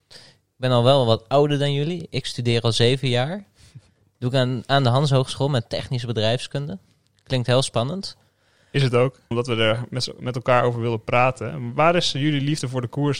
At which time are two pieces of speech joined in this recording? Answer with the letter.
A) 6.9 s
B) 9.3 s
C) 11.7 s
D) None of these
B